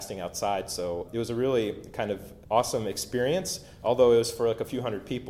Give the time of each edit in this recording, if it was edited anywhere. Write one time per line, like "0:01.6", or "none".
0:01.0
0:02.4